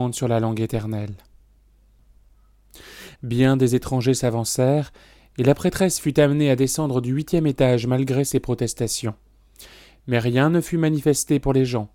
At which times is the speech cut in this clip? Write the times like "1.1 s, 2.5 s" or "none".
3.2 s

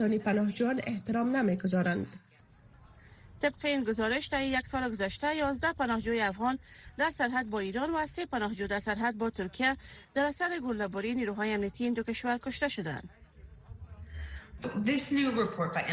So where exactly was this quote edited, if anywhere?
14.6 s

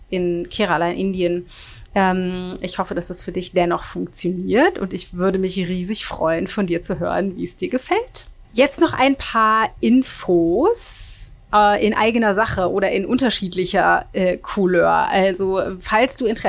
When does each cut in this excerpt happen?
1.9 s

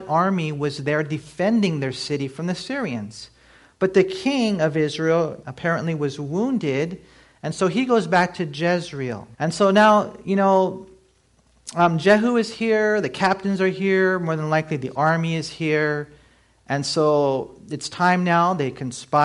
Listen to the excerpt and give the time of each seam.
5.4 s, 9.3 s

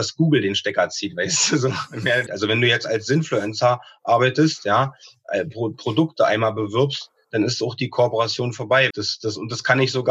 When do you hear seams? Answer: 2.3 s, 8.9 s

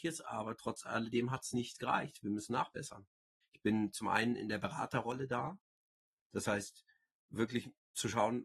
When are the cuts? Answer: 3.4 s

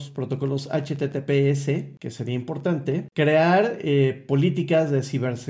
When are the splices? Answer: none

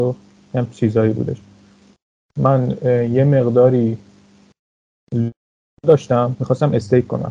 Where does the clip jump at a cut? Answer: none

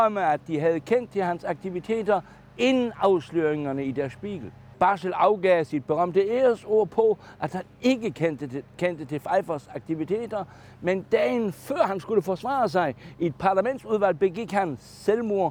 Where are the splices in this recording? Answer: 4.7 s

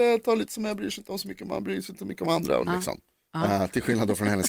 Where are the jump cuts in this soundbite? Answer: 2.6 s

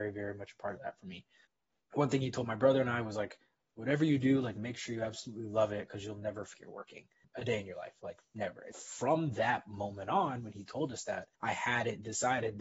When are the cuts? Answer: 6.5 s, 8.7 s, 11.3 s

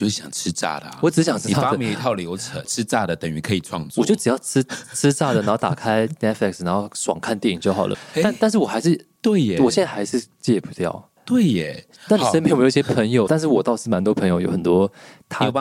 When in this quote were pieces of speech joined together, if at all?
2.6 s, 7.9 s, 13.3 s

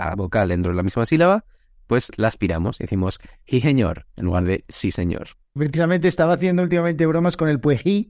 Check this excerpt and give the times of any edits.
5.6 s

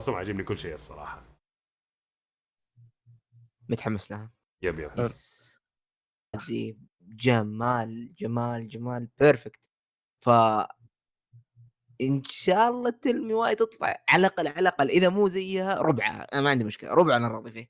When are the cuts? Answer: 6.3 s

